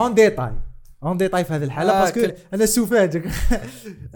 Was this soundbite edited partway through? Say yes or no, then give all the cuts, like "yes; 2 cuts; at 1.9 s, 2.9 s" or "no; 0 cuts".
yes; 1 cut; at 2.3 s